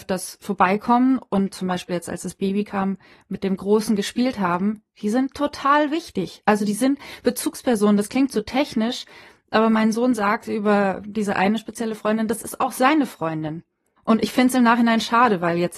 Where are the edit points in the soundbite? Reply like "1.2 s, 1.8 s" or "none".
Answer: 14.0 s